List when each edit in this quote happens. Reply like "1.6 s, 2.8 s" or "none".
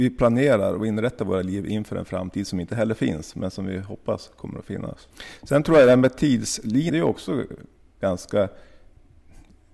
6.9 s